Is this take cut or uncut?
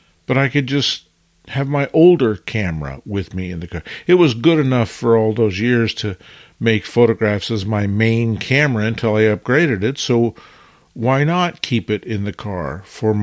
uncut